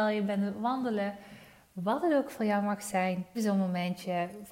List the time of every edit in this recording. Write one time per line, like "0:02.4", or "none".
0:03.3